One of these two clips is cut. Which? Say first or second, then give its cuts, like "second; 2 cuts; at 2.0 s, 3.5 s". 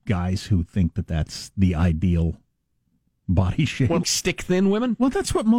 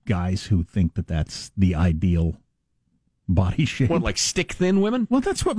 first; 1 cut; at 4.0 s